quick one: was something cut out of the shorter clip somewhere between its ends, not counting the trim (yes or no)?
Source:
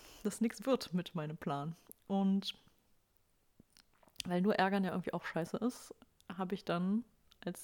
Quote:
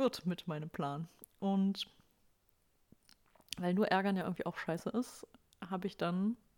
no